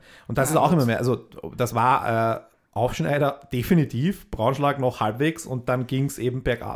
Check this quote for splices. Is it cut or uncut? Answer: uncut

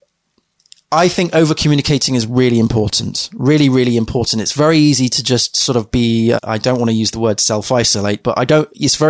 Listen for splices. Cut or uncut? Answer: cut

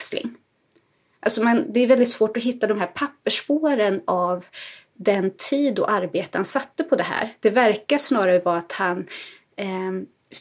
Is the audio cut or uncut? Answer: uncut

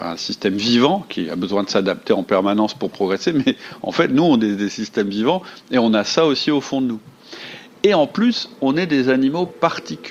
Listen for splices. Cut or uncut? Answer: uncut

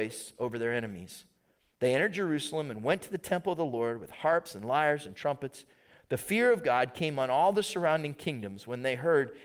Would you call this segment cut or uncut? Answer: uncut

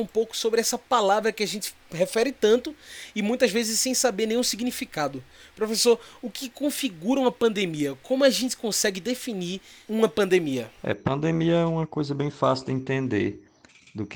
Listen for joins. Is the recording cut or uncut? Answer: uncut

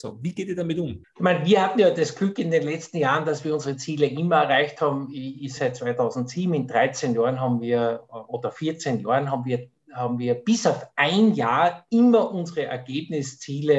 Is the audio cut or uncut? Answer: cut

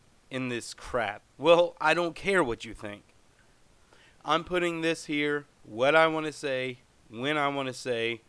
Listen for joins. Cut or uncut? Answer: cut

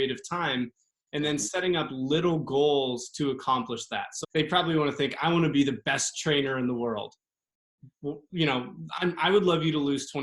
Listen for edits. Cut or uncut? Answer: cut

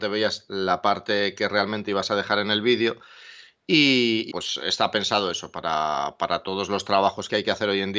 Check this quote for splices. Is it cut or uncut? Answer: cut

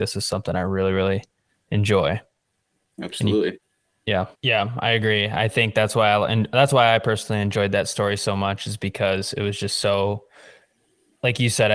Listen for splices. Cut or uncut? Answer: cut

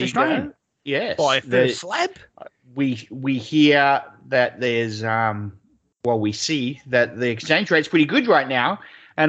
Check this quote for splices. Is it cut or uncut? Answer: uncut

